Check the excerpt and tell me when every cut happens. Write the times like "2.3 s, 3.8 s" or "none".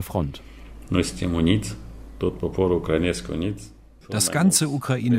4.0 s

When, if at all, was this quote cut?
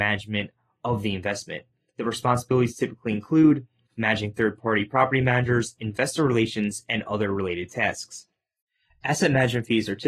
none

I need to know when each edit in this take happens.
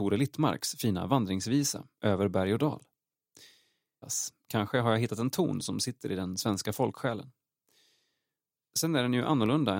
4.0 s

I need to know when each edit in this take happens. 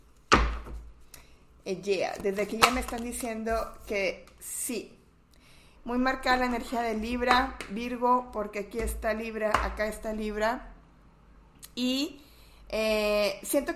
5.8 s

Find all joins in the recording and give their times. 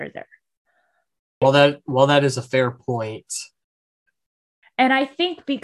1.4 s, 4.6 s

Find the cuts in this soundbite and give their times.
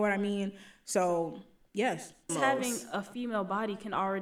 2.3 s

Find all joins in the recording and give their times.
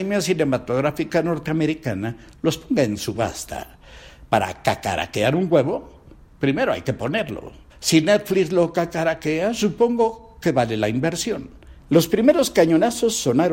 7.7 s, 11.8 s

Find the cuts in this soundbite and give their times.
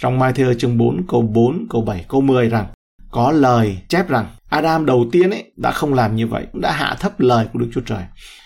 6.5 s

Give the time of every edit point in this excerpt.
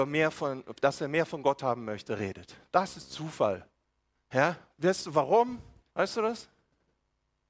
5.9 s

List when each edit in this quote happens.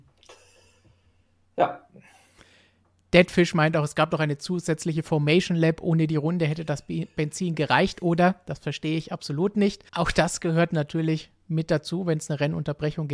9.9 s

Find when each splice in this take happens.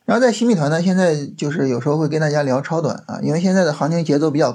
none

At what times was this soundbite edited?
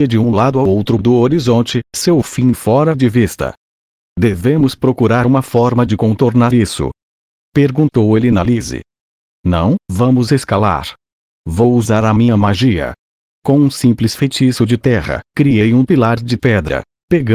none

